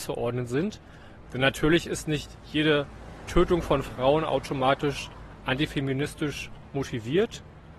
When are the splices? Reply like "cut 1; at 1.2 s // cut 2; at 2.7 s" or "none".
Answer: cut 1; at 1.3 s

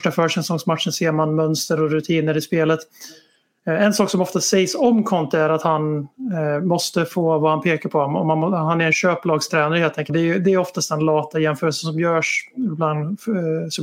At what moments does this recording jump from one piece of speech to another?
cut 1; at 10.1 s

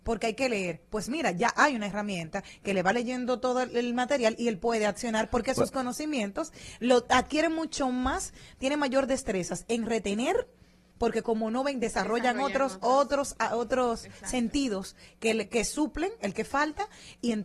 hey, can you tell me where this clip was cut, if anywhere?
cut 1; at 15.5 s

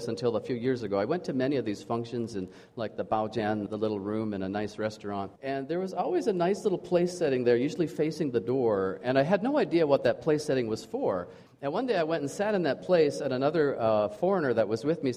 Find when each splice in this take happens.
cut 1; at 3.7 s // cut 2; at 5.4 s // cut 3; at 11.5 s

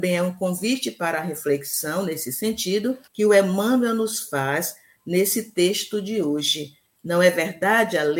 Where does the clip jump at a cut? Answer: cut 1; at 3.1 s // cut 2; at 7.0 s

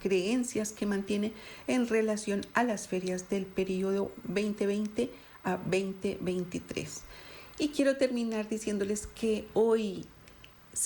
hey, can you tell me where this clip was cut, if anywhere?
cut 1; at 7.6 s

